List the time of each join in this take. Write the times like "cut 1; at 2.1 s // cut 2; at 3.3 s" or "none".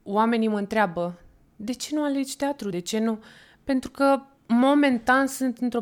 cut 1; at 2.7 s